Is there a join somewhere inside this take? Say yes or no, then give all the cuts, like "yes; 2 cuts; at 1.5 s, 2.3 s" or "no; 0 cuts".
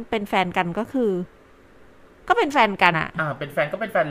yes; 1 cut; at 2.9 s